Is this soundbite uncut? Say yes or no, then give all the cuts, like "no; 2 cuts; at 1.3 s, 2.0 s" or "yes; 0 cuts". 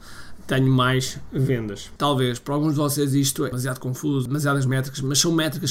yes; 0 cuts